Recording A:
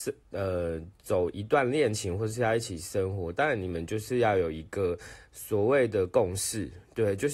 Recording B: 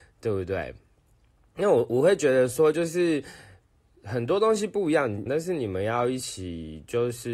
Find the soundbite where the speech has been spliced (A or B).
B